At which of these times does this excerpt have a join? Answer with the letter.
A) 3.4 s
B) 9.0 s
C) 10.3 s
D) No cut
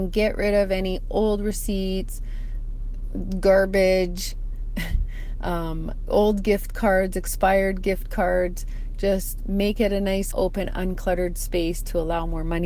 C